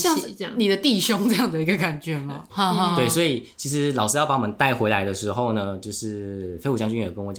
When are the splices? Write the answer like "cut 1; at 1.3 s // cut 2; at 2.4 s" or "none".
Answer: cut 1; at 2.5 s